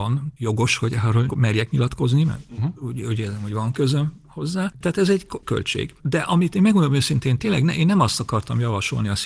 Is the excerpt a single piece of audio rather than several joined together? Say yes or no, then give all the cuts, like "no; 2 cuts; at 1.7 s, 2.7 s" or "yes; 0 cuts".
yes; 0 cuts